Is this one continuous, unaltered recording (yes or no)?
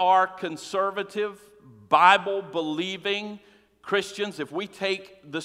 yes